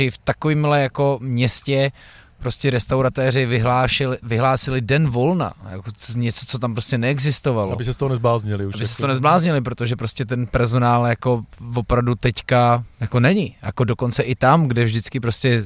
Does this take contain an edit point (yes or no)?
no